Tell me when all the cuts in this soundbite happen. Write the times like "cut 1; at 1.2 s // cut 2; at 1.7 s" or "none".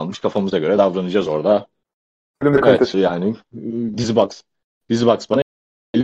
cut 1; at 2.9 s // cut 2; at 3.9 s

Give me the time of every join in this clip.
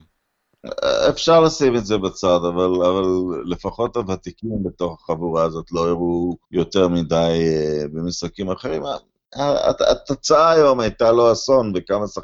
cut 1; at 6.4 s

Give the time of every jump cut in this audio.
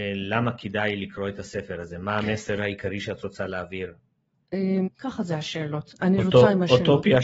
cut 1; at 4.8 s

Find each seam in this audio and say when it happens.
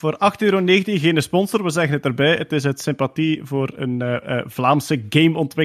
none

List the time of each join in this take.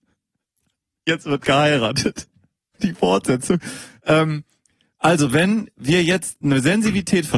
cut 1; at 2.7 s

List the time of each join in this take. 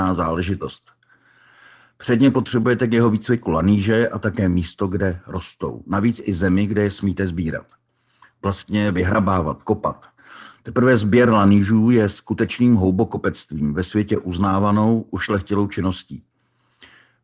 none

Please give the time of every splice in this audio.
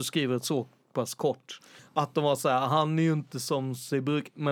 cut 1; at 1.8 s

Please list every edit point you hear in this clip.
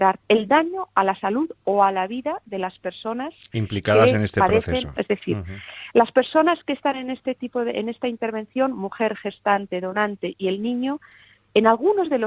cut 1; at 5.0 s

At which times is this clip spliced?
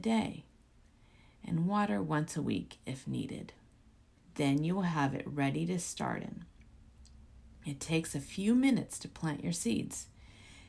cut 1; at 4.2 s

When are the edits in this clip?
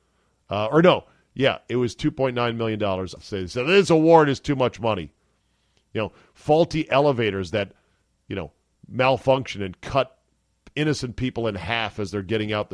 cut 1; at 3.2 s

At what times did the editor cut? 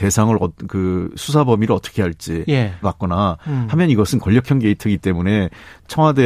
cut 1; at 2.8 s

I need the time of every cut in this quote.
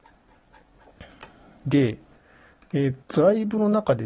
cut 1; at 3.0 s

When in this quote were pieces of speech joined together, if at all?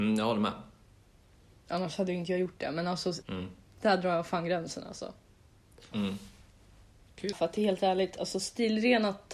cut 1; at 3.2 s // cut 2; at 5.9 s // cut 3; at 7.3 s

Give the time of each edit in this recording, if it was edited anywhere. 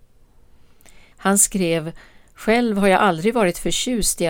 cut 1; at 1.1 s

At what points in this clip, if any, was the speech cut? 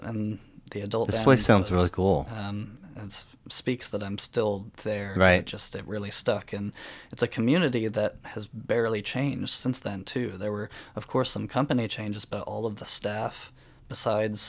cut 1; at 2.3 s

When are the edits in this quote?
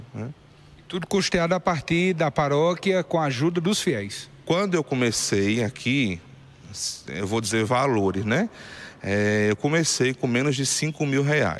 cut 1; at 4.4 s

